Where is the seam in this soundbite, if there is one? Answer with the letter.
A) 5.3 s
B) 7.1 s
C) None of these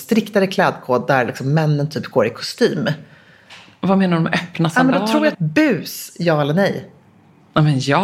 A